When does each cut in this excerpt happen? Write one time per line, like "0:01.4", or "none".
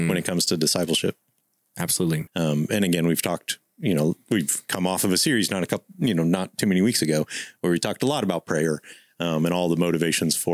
0:02.3